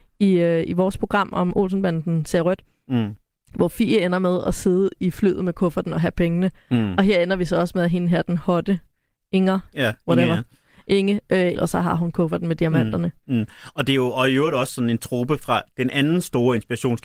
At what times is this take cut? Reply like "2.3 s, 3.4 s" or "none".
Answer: 9.7 s, 11.5 s